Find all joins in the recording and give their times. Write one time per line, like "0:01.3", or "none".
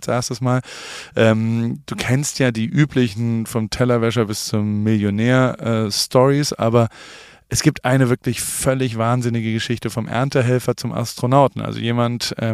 none

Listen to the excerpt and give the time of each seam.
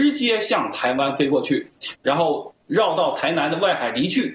0:02.0

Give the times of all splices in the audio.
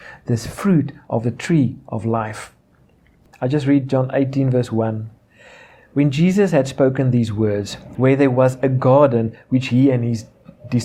0:03.3
0:07.9

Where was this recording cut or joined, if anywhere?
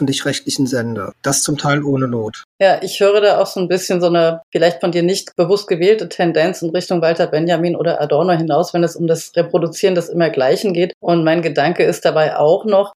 none

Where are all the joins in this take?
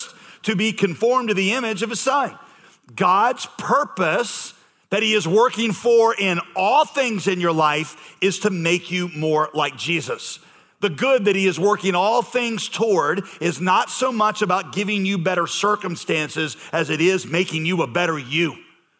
none

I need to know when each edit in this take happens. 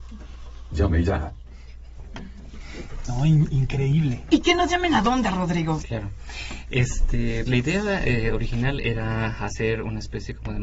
0:05.8
0:07.5

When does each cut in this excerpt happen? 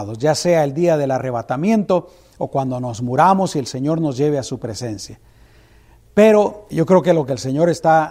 0:06.7

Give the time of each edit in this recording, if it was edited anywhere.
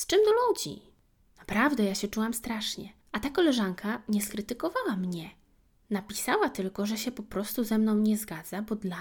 0:03.0

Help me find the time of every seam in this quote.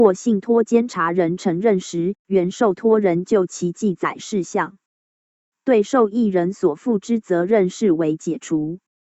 none

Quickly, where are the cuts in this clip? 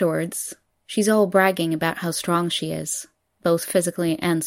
none

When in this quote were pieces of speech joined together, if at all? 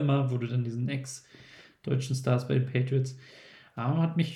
none

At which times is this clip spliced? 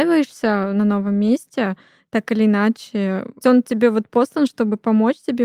0:03.4

